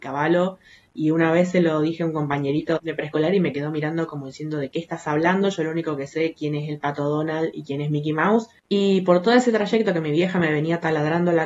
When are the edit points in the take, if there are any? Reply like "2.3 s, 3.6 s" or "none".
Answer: 2.8 s